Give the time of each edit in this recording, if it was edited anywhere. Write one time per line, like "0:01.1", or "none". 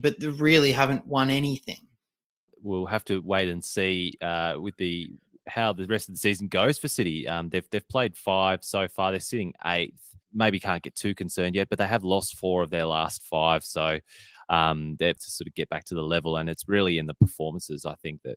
0:10.2
0:15.2